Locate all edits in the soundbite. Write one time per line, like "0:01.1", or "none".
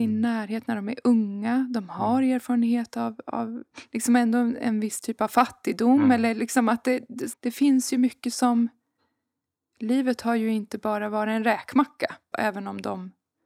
0:07.3
0:12.3